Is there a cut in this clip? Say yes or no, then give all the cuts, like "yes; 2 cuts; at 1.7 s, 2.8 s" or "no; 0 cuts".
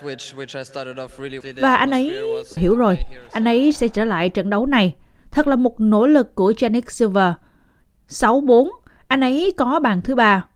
yes; 2 cuts; at 1.4 s, 2.6 s